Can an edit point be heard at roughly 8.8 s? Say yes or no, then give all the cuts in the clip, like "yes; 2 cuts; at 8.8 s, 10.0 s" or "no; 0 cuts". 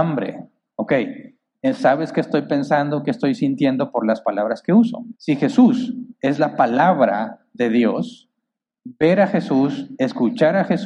yes; 2 cuts; at 5.2 s, 8.8 s